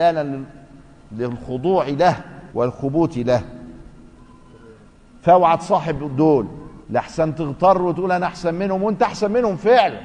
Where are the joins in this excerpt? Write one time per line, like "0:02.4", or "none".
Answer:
0:02.5
0:06.8